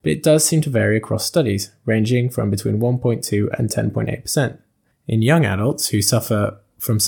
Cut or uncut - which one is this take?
uncut